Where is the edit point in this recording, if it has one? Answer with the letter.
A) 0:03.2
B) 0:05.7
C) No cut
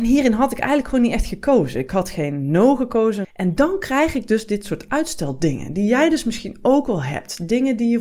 A